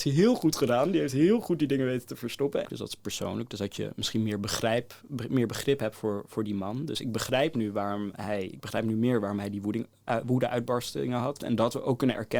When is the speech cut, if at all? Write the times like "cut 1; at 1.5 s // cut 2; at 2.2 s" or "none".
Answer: cut 1; at 2.6 s // cut 2; at 11.4 s